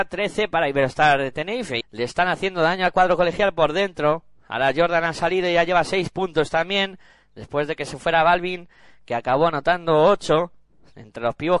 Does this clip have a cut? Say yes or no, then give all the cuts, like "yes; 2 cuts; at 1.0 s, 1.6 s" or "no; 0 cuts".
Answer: yes; 1 cut; at 1.8 s